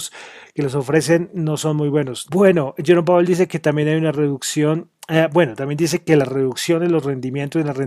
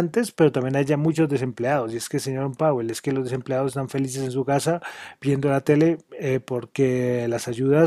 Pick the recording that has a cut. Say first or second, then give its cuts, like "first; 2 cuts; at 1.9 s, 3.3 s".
first; 1 cut; at 2.3 s